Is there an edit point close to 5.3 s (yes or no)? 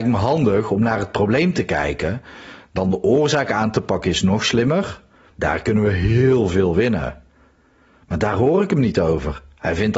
yes